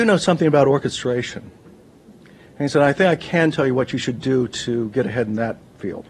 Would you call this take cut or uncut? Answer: uncut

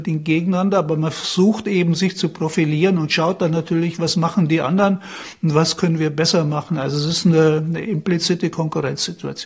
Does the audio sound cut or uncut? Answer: uncut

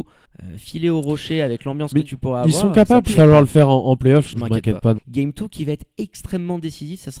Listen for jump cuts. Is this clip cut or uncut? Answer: cut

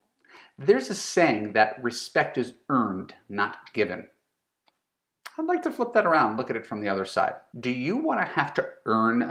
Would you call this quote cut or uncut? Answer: uncut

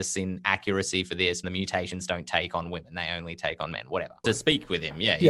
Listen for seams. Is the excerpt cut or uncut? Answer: cut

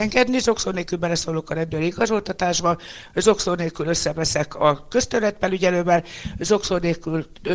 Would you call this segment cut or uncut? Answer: uncut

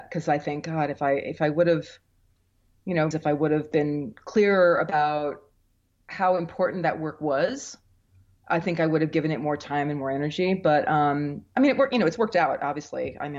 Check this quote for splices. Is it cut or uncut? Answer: cut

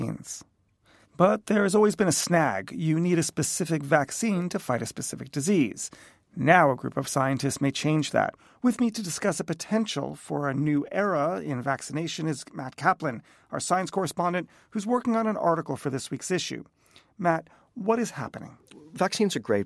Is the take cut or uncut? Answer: cut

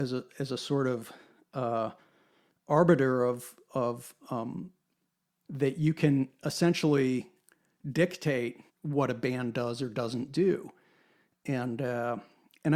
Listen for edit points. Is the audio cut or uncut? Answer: cut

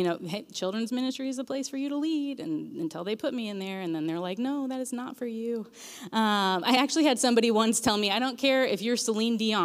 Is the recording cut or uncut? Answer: uncut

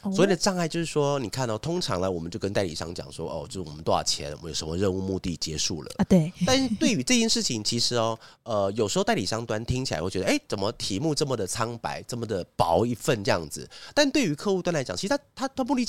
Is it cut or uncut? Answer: uncut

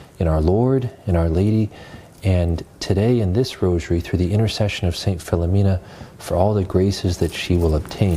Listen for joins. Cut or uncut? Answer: uncut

